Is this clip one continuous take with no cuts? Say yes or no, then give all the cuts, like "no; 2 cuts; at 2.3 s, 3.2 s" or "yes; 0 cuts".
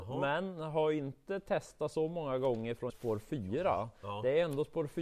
no; 1 cut; at 2.9 s